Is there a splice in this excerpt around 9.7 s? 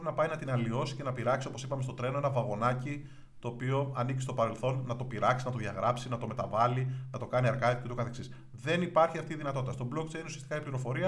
no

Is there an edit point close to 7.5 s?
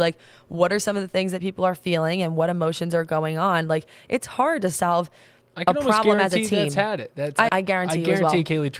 yes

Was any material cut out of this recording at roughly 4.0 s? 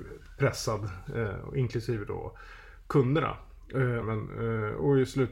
yes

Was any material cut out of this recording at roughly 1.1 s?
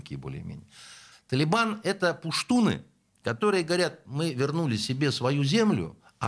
yes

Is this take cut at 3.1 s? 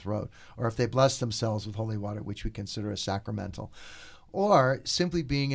no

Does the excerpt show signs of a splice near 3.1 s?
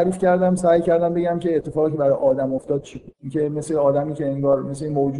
yes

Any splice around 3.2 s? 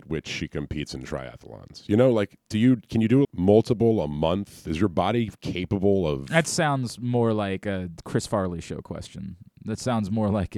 yes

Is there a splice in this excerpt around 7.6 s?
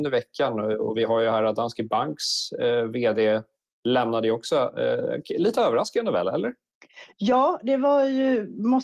no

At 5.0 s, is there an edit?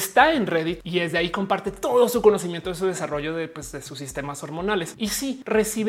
no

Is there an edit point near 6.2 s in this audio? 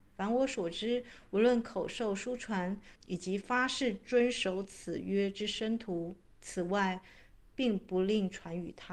no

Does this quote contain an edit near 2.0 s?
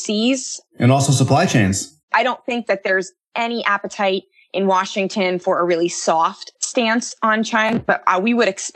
yes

